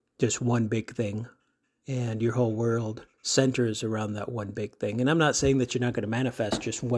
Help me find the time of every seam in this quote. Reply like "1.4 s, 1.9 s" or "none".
3.1 s